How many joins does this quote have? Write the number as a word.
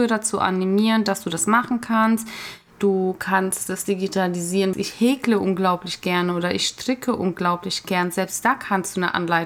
one